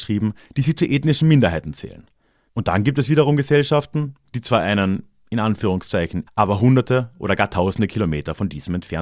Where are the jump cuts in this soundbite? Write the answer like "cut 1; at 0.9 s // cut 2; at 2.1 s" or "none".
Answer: cut 1; at 2.5 s // cut 2; at 6.3 s